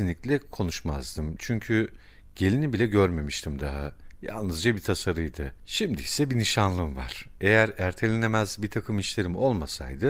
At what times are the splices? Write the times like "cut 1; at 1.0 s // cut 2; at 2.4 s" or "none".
cut 1; at 7.4 s